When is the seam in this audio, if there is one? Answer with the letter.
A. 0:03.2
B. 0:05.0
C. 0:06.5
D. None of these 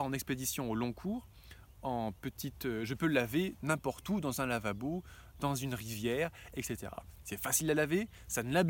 C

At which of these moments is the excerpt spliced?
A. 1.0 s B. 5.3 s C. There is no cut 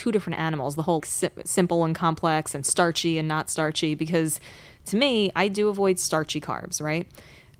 A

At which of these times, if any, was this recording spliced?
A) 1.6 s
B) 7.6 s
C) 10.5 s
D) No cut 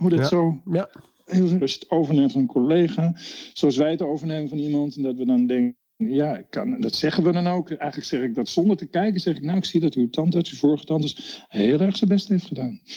A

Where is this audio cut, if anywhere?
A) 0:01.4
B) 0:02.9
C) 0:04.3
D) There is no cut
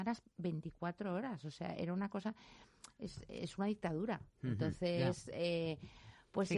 D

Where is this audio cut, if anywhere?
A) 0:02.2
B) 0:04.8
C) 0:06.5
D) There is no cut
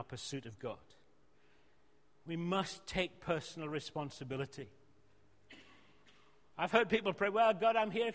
D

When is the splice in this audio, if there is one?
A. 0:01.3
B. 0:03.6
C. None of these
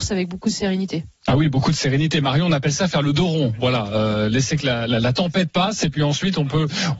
C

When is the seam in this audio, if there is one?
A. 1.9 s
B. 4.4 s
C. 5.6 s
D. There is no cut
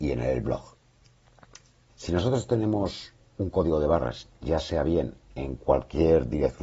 A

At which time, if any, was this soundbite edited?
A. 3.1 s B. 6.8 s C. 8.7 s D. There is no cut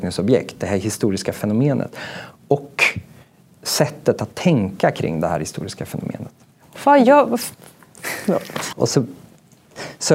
C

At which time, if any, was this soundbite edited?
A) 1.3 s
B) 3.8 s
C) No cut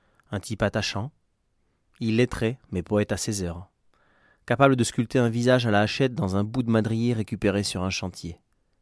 C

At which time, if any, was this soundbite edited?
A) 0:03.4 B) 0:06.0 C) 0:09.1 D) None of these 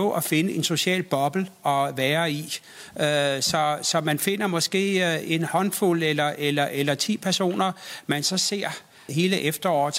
C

